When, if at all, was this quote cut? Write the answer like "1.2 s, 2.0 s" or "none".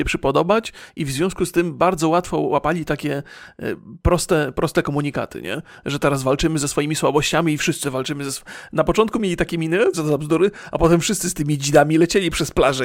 7.8 s, 9.9 s

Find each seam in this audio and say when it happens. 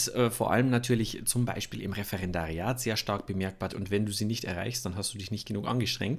3.7 s

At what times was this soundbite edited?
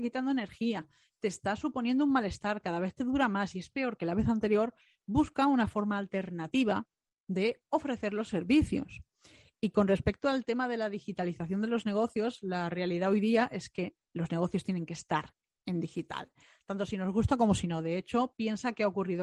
none

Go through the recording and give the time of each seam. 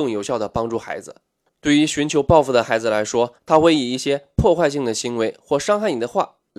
1.5 s

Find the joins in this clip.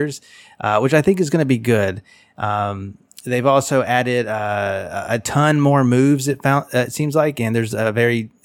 none

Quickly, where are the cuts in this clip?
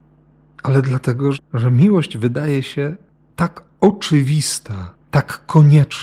1.3 s

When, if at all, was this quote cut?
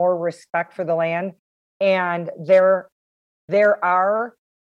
3.3 s

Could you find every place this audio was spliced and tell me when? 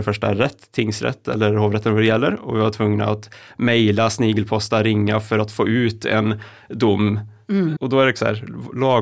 7.8 s

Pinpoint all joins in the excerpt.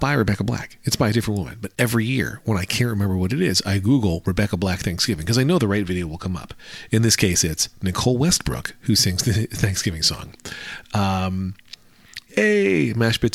12.3 s

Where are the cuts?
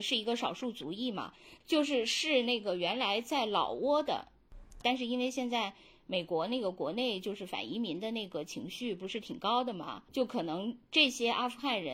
1.6 s, 4.8 s, 10.1 s

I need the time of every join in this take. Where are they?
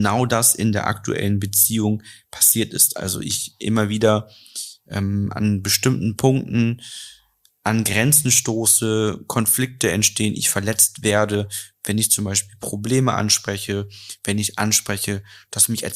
none

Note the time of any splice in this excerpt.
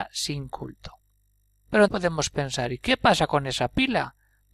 1.9 s

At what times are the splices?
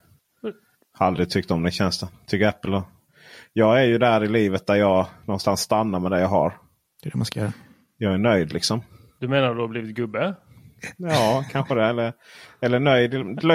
none

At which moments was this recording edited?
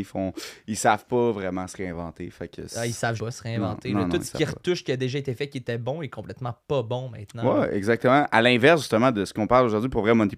3.2 s

